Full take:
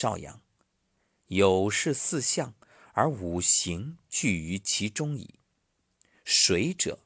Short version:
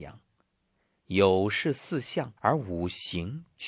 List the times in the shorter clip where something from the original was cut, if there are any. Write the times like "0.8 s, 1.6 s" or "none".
2.4 s